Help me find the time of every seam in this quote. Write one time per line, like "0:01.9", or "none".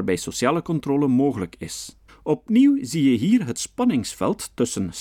0:02.1